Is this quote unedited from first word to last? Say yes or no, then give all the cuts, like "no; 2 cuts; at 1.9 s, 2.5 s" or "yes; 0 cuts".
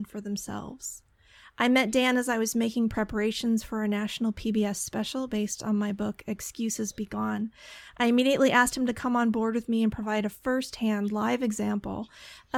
yes; 0 cuts